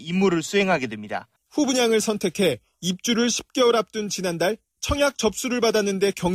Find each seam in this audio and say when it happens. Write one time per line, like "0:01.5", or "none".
0:01.4